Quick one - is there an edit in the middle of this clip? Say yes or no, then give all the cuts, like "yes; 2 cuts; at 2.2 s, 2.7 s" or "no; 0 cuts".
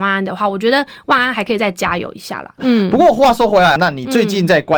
yes; 2 cuts; at 2.6 s, 3.8 s